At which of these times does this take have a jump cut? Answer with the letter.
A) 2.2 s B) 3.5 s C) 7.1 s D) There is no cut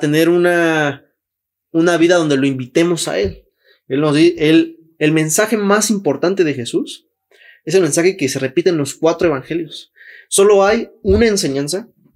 D